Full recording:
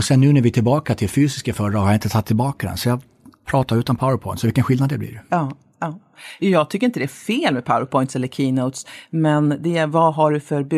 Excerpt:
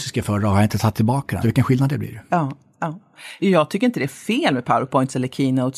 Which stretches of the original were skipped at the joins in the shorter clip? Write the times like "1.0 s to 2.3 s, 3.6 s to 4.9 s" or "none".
2.7 s to 4.4 s